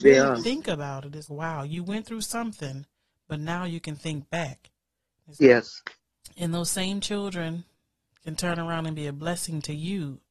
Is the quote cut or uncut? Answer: cut